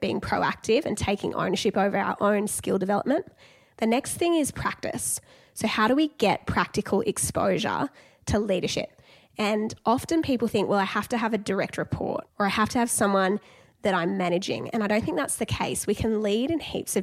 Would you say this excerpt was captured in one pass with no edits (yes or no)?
yes